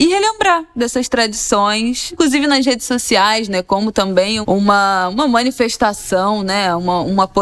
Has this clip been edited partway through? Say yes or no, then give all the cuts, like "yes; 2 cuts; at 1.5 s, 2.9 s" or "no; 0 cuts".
yes; 1 cut; at 4.4 s